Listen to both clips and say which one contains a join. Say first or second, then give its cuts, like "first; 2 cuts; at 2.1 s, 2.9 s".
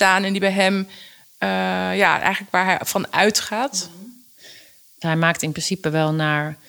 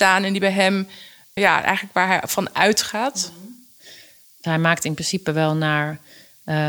second; 1 cut; at 1.4 s